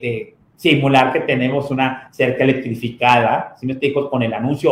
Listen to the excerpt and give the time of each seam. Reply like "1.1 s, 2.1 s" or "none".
none

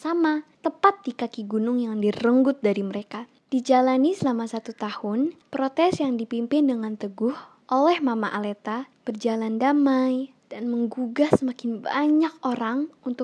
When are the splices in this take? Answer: 10.4 s

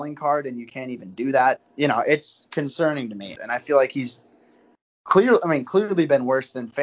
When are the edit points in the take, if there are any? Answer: 1.6 s, 3.3 s

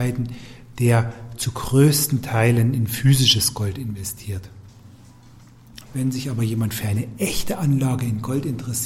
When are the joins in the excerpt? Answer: 5.9 s

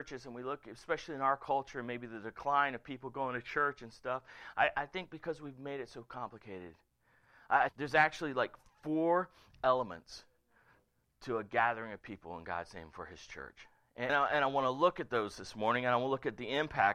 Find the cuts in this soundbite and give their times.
7.7 s, 14.1 s

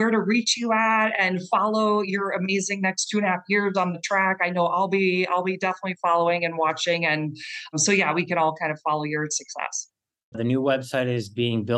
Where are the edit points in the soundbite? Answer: 10.3 s

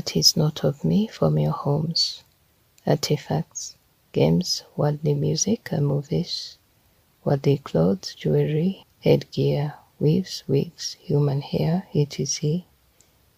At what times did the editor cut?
8.8 s

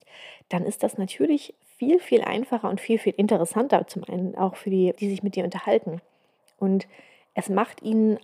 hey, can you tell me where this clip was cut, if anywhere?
5.0 s

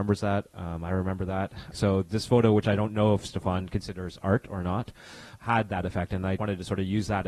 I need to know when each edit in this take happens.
1.7 s, 5.4 s, 6.4 s

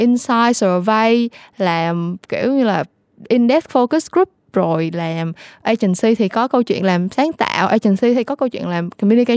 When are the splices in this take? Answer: none

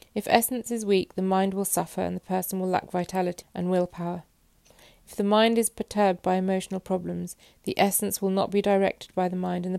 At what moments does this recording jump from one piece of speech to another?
3.4 s

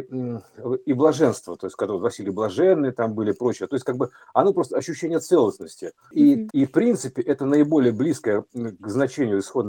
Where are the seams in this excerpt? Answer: 6.5 s

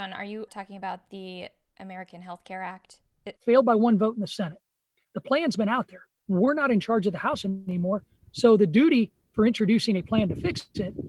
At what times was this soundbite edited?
3.4 s, 6.2 s

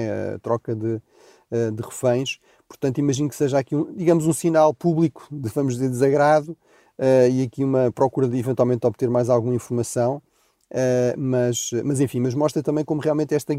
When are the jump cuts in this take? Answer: none

